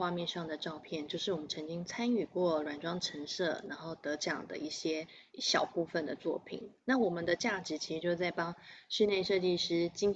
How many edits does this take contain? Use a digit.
0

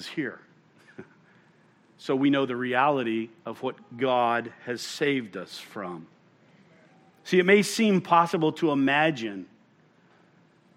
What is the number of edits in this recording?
0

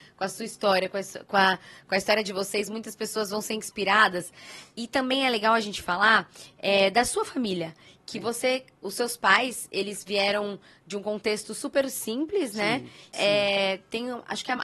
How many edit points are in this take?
1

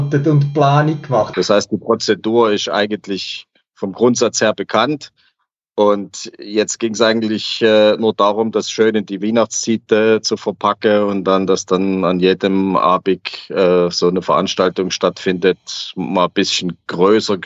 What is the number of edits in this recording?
1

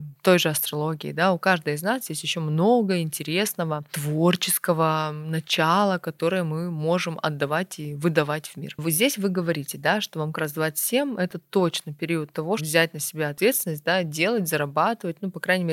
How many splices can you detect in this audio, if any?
1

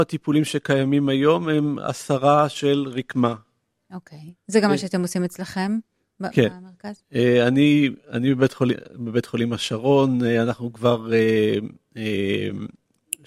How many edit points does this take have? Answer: 0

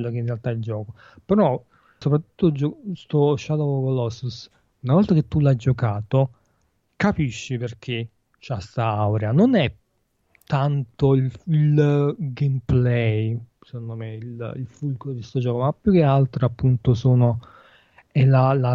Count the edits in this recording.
1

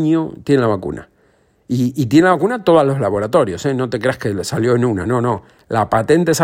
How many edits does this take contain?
0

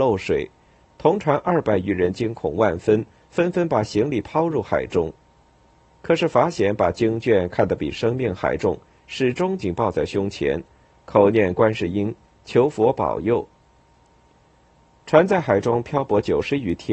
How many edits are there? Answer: 1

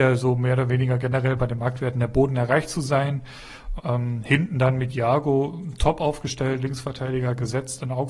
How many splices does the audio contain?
1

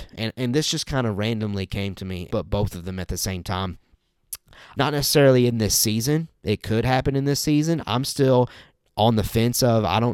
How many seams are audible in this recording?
2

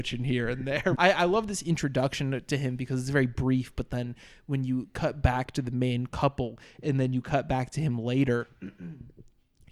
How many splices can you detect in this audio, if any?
1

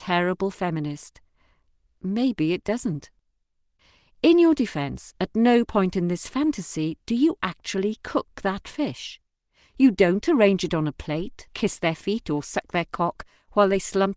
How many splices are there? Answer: 1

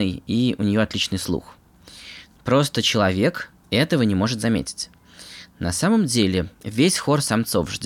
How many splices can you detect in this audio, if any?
2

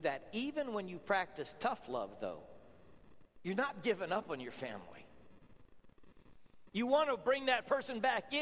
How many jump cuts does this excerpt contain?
1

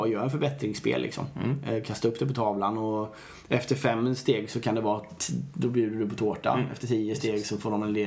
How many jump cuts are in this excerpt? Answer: 0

